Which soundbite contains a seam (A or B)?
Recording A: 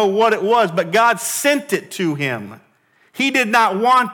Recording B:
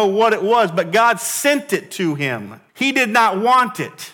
B